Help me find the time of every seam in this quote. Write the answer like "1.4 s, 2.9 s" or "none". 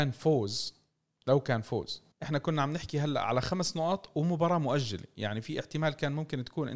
2.1 s